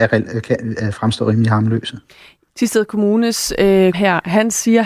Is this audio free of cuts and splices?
no; 2 cuts; at 2.5 s, 3.9 s

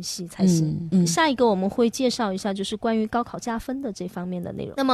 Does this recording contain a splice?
no; 0 cuts

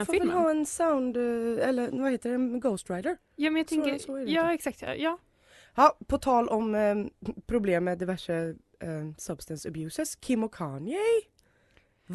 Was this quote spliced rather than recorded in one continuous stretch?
no; 0 cuts

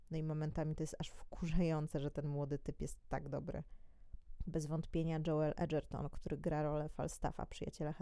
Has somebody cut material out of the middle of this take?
yes; 1 cut; at 4.4 s

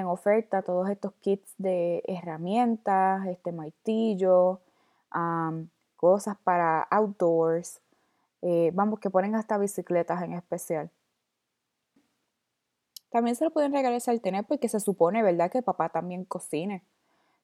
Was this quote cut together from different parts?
yes; 1 cut; at 12.0 s

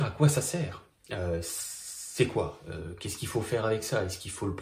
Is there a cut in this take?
no; 0 cuts

